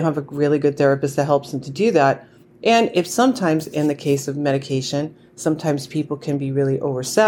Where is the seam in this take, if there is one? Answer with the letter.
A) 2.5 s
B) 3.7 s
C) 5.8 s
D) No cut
D